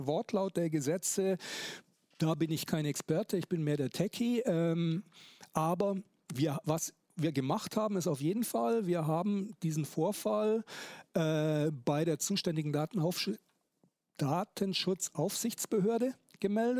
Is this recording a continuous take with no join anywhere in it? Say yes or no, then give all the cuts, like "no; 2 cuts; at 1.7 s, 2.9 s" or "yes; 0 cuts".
yes; 0 cuts